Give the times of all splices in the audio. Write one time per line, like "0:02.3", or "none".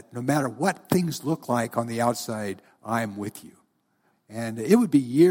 0:04.1